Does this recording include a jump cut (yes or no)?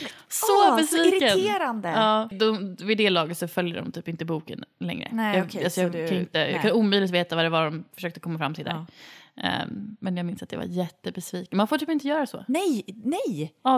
yes